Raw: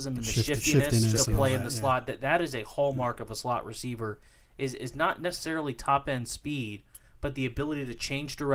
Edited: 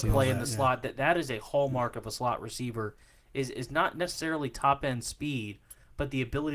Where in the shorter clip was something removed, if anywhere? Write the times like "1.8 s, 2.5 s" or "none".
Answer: none